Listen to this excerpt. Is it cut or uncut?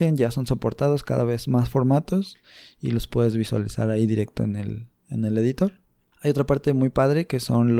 uncut